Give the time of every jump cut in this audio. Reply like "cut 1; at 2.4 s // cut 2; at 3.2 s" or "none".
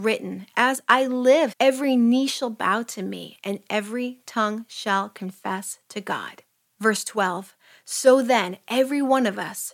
cut 1; at 1.5 s